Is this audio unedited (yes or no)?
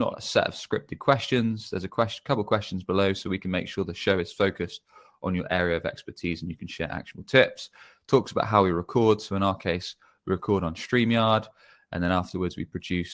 yes